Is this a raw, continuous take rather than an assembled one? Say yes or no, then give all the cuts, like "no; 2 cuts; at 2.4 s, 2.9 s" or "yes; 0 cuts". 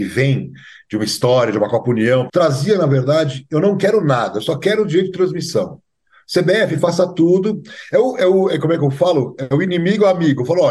no; 1 cut; at 2.3 s